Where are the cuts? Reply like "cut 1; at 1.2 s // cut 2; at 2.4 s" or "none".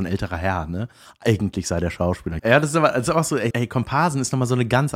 cut 1; at 2.4 s // cut 2; at 3.5 s

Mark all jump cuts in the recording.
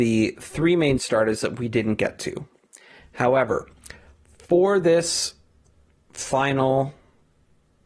none

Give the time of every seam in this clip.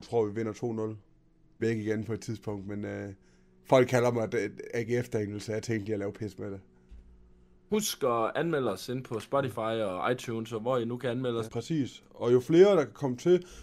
cut 1; at 1.6 s // cut 2; at 7.7 s // cut 3; at 11.5 s

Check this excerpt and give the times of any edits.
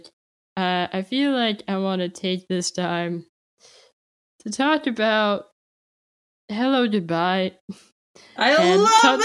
none

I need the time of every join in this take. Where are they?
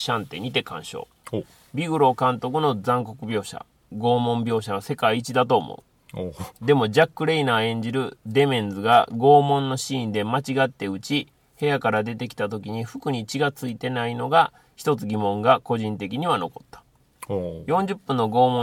none

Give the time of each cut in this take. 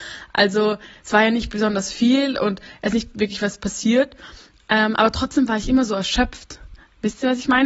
none

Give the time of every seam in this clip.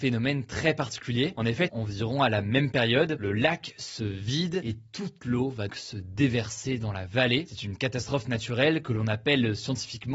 cut 1; at 1.7 s // cut 2; at 5.7 s

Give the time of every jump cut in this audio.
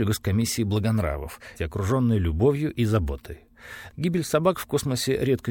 cut 1; at 1.5 s // cut 2; at 3.9 s

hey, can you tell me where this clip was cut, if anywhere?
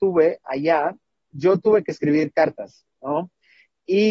none

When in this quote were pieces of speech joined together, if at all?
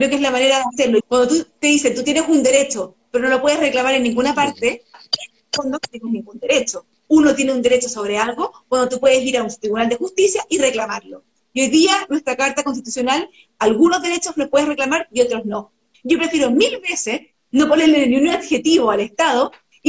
cut 1; at 1.0 s // cut 2; at 15.9 s

